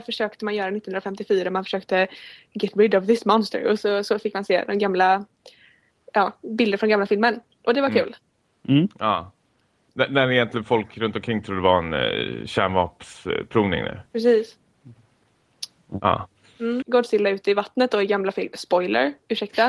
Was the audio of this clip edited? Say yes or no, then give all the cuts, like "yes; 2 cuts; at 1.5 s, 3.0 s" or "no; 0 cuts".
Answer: yes; 1 cut; at 16.8 s